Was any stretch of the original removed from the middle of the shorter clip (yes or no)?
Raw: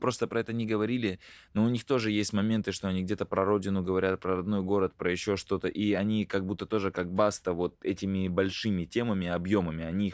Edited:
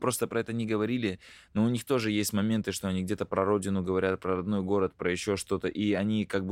no